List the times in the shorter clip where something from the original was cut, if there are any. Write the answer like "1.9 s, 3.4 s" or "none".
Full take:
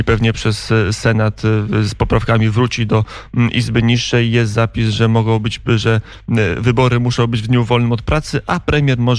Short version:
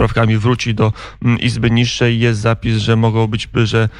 none